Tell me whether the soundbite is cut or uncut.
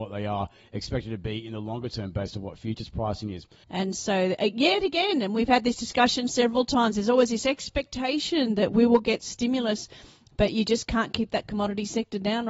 cut